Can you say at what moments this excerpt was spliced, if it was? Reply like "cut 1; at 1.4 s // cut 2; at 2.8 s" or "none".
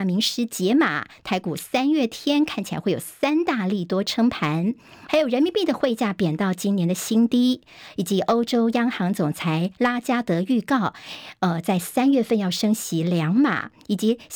cut 1; at 5.1 s